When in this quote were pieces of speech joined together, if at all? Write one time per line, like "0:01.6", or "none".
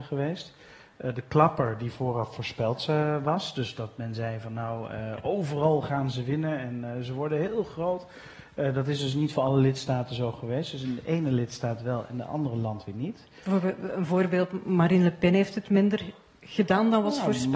none